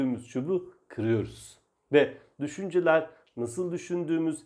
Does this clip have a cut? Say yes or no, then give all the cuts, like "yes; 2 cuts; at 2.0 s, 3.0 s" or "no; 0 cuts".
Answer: no; 0 cuts